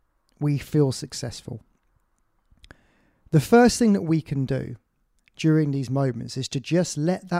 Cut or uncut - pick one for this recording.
uncut